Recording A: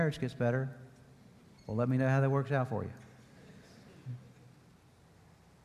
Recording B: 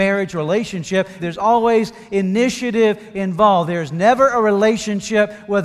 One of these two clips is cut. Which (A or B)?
B